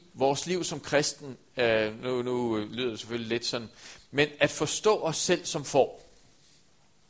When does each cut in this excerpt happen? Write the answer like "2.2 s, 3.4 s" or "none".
none